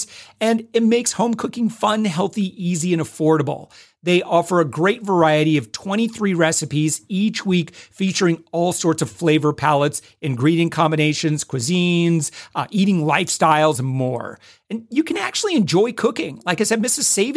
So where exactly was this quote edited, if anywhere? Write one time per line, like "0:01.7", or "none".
none